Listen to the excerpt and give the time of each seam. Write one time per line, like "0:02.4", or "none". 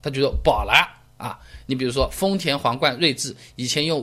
none